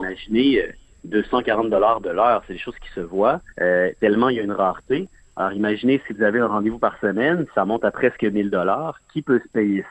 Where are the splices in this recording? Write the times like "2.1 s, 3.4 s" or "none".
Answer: 3.5 s